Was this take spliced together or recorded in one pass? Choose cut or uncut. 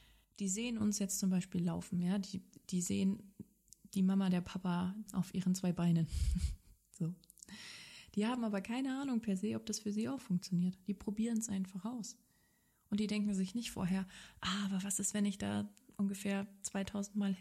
cut